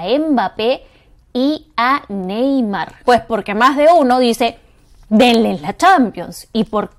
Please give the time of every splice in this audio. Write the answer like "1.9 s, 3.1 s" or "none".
3.0 s